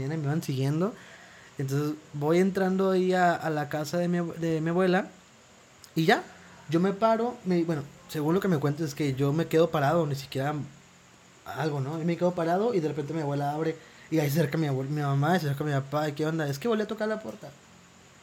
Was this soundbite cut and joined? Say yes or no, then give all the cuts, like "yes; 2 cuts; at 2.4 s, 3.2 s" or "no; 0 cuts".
no; 0 cuts